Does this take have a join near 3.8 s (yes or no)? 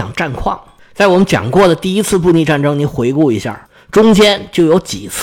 no